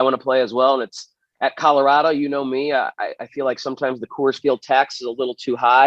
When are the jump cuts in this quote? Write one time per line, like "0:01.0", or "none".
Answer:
none

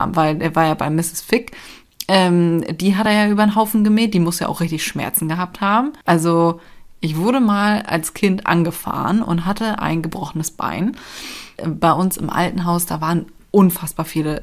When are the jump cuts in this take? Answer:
0:06.0
0:11.6

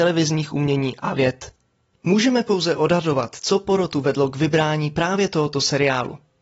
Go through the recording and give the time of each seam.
none

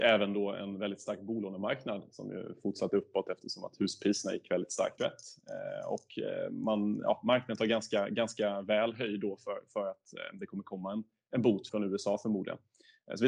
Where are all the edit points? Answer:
0:05.0
0:11.7

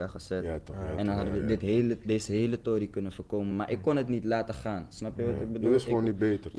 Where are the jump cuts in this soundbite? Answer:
none

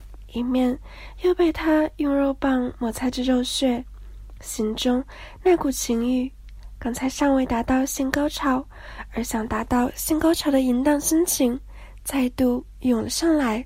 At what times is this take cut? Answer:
none

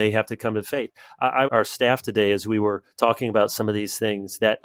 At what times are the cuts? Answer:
0:01.5
0:02.9

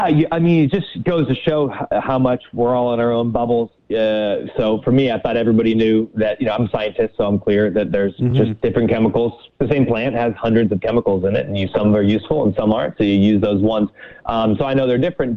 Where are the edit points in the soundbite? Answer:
none

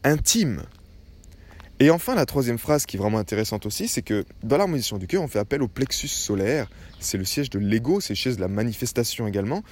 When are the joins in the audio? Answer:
none

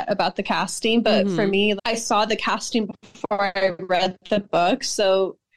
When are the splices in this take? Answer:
0:01.8

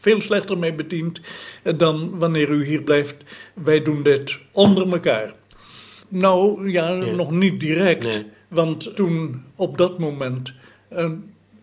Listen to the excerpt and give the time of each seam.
0:06.0
0:08.9

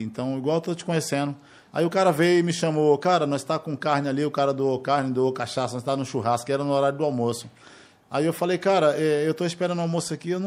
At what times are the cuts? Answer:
none

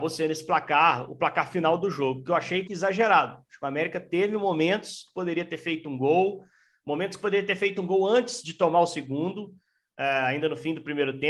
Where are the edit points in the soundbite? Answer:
0:02.7

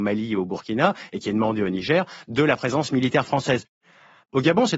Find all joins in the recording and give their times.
none

